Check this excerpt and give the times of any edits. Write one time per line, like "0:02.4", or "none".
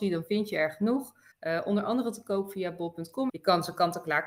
0:01.3
0:03.3